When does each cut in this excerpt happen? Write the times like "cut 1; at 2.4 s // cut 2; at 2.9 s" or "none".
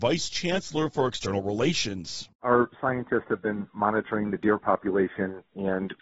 cut 1; at 2.3 s